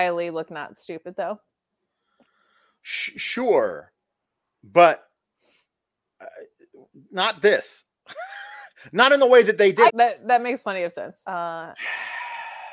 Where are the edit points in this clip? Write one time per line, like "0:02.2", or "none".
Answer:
0:09.9
0:11.3